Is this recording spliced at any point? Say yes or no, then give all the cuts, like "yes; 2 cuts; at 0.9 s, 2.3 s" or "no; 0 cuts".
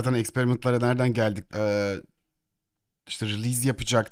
yes; 1 cut; at 1.5 s